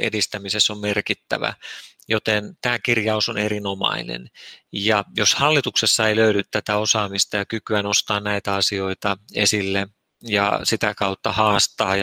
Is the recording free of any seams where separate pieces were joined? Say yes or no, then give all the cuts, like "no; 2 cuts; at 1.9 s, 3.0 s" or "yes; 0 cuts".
yes; 0 cuts